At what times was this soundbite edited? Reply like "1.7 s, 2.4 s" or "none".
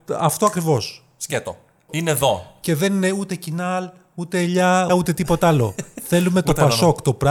1.9 s, 4.9 s